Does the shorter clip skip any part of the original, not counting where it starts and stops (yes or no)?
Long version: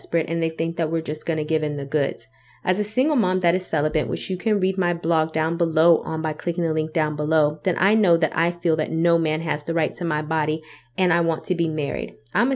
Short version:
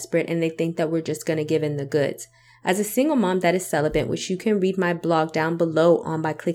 no